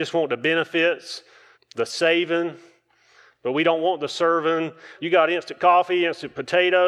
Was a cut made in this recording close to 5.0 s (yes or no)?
yes